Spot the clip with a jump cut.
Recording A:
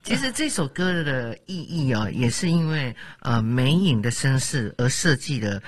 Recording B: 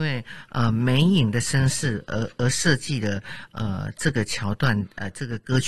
A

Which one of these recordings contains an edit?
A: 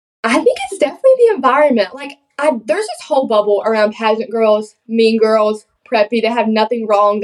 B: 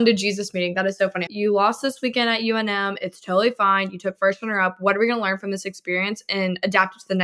B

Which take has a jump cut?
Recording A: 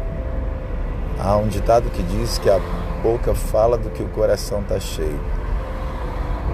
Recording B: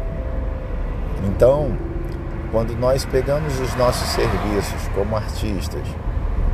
B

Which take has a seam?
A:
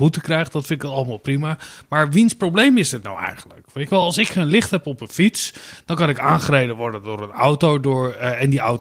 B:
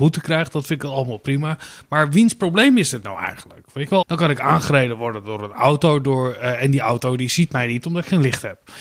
B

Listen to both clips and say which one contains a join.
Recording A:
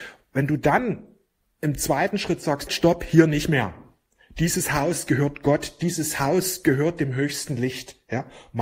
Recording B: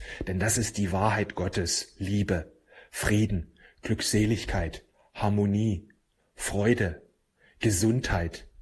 A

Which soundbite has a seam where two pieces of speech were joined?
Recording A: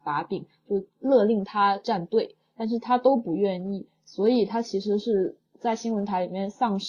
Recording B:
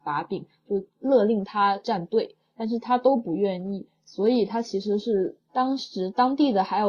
B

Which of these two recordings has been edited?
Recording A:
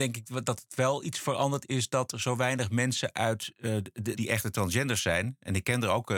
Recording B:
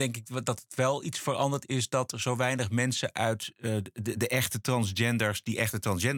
A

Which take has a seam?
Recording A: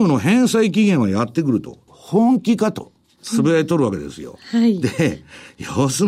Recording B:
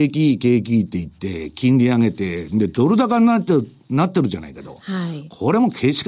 A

